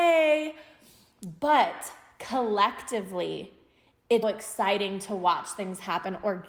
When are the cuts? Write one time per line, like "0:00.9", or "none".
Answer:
0:04.2